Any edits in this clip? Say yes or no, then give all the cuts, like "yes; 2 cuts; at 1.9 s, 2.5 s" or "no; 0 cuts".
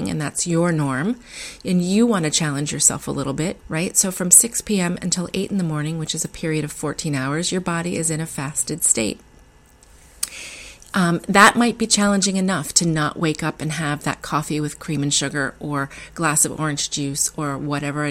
yes; 1 cut; at 3.6 s